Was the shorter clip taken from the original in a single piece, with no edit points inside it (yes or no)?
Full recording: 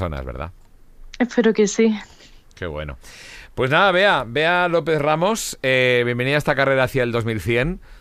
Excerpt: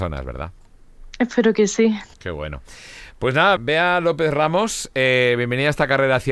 no